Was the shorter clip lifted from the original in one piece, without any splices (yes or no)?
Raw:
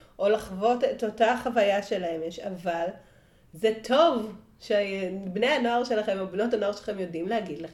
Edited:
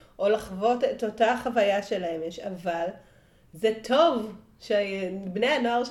yes